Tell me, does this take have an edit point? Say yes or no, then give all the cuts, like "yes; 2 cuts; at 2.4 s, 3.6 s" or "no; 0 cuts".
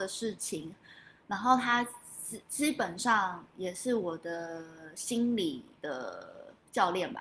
no; 0 cuts